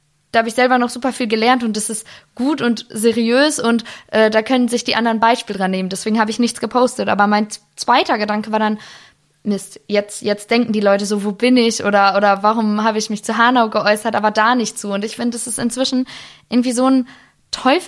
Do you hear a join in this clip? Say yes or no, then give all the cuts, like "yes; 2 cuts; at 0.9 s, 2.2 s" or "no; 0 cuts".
no; 0 cuts